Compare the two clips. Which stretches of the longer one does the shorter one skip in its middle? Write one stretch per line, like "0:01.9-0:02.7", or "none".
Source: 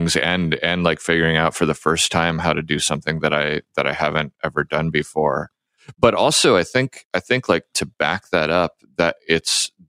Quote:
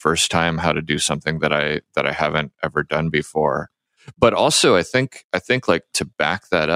none

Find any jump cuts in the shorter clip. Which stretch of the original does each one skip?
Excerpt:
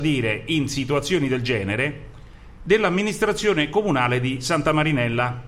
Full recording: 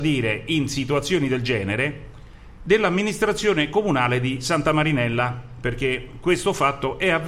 none

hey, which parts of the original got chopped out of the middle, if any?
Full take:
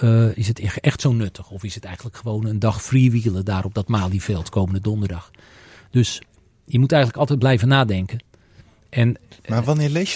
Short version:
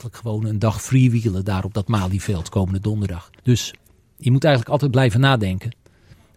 0:05.4-0:05.9

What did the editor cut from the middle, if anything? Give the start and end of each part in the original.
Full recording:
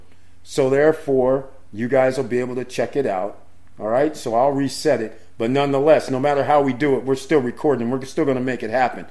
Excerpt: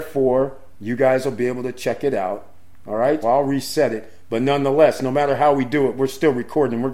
0:04.1-0:04.3

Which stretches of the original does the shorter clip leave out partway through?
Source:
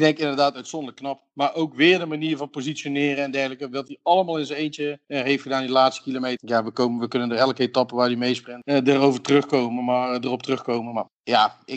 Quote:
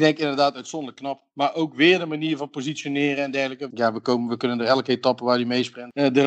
0:03.7-0:06.4

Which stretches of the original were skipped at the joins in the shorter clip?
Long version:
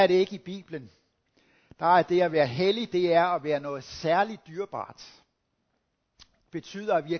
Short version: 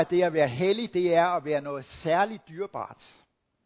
none

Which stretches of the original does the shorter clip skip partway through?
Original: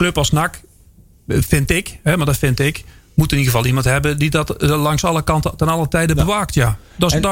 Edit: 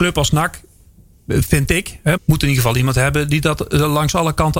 0:02.2-0:03.1

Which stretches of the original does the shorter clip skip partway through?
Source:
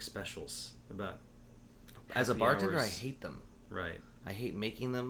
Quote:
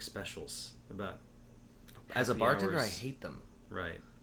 none

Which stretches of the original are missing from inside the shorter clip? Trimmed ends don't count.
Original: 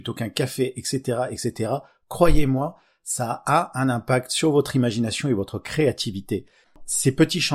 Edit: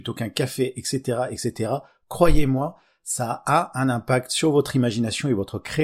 none

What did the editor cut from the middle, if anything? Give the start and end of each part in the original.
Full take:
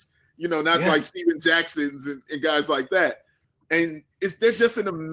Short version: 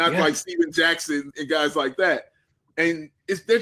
0:02.0-0:02.2

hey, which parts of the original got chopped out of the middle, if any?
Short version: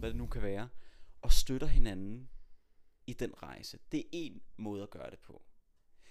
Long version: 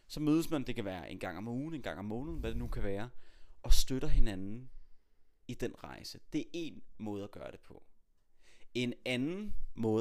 none

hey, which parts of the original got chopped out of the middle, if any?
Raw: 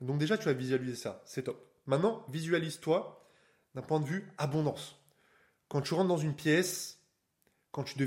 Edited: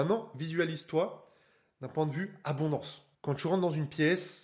0:05.1-0:05.6

